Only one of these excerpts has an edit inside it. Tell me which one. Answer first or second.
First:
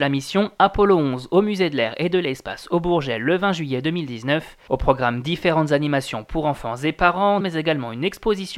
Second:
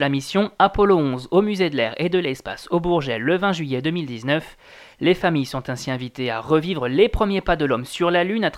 first